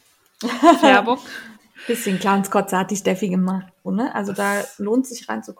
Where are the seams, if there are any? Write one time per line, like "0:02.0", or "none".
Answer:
0:01.5
0:03.9

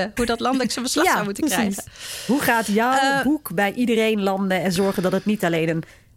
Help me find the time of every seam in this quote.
none

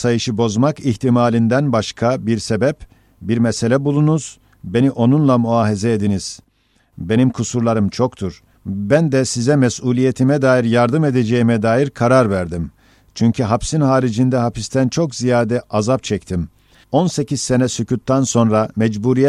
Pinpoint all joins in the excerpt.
0:16.8

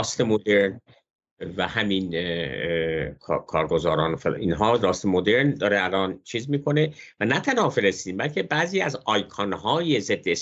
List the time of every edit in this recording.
none

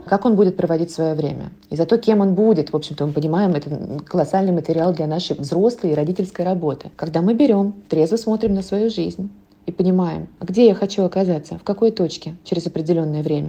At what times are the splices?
0:06.9

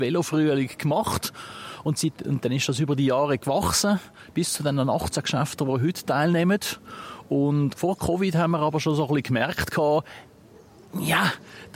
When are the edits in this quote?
0:07.7

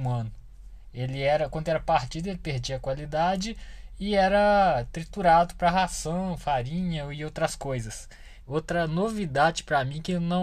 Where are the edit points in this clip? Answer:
0:08.4

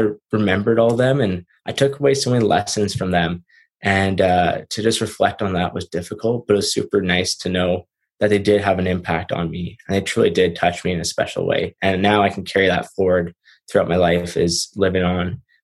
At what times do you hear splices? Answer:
0:06.6

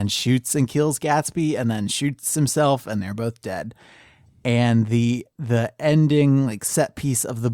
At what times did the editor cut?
none

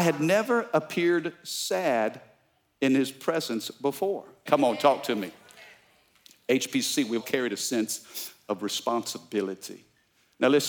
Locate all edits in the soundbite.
0:04.5
0:07.2

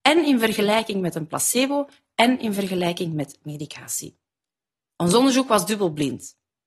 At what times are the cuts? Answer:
none

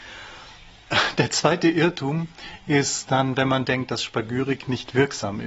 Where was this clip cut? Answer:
none

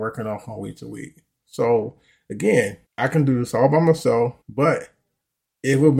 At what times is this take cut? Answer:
0:01.4
0:02.8
0:04.4

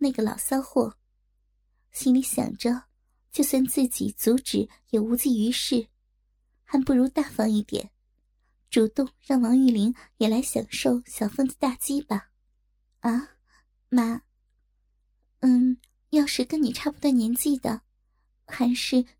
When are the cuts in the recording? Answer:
0:14.6

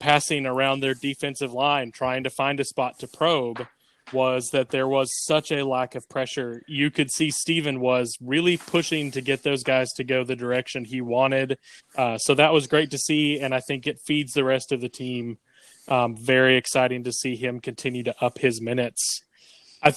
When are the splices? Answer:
0:11.8

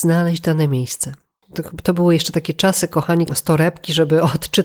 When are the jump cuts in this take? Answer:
0:01.4
0:03.3

